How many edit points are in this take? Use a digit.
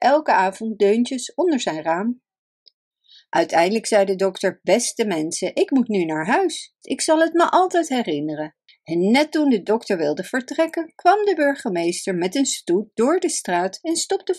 2